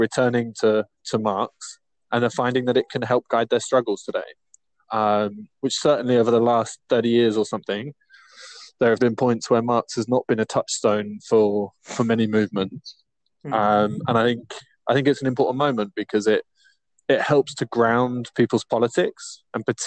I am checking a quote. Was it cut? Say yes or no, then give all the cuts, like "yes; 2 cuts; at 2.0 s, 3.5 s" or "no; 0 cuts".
yes; 1 cut; at 9.0 s